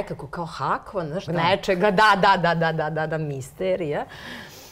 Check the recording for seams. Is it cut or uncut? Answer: cut